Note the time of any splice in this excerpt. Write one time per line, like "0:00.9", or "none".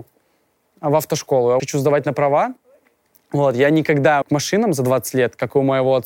0:01.6
0:04.2